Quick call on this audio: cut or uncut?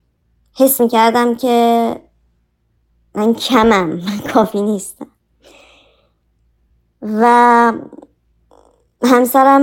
uncut